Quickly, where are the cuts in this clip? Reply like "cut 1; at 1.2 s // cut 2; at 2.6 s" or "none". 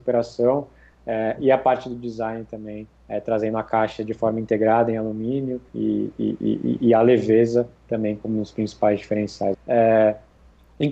cut 1; at 5.7 s // cut 2; at 9.5 s